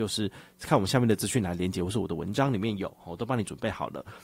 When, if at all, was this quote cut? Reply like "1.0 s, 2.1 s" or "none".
none